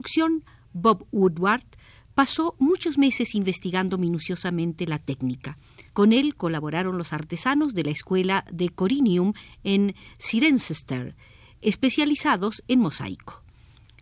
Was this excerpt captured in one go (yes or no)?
no